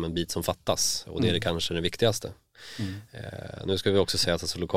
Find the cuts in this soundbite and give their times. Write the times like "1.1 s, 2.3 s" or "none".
none